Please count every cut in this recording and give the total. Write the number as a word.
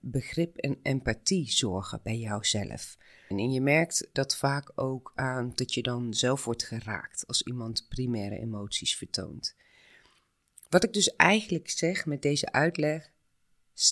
one